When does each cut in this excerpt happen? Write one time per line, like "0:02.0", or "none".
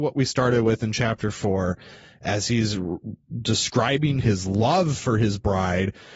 0:04.2